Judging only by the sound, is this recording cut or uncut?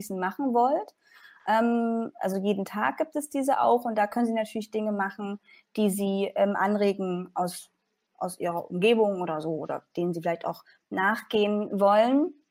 cut